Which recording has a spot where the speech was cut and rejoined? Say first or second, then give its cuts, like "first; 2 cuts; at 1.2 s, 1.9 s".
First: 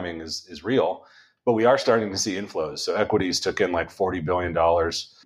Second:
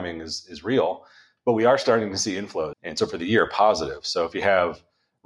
second; 1 cut; at 2.7 s